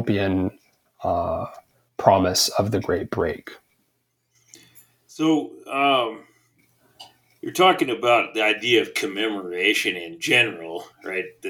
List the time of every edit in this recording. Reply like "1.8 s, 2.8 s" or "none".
none